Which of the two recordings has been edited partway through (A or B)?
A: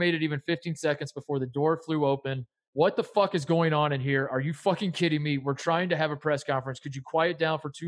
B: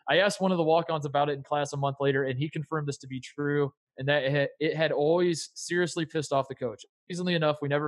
A